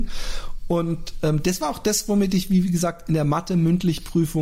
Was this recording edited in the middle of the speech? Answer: no; 0 cuts

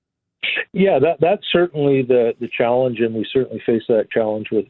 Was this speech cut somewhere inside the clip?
no; 0 cuts

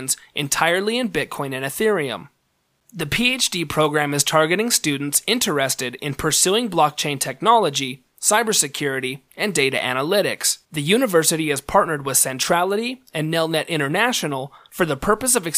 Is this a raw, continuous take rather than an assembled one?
no; 1 cut; at 10.6 s

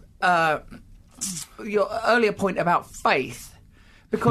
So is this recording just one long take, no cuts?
no; 1 cut; at 1.6 s

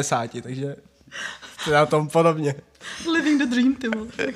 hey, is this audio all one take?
yes; 0 cuts

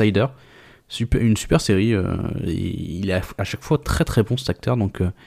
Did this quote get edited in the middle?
no; 0 cuts

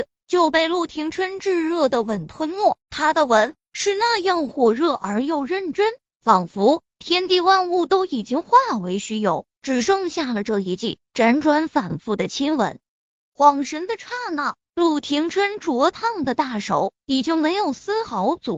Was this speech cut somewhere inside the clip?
yes; 2 cuts; at 2.8 s, 13.2 s

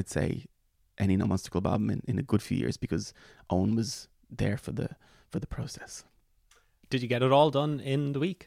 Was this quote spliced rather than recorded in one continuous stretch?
no; 0 cuts

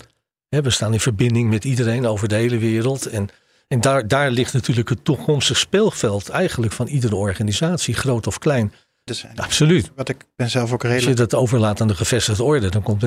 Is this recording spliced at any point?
yes; 1 cut; at 9.1 s

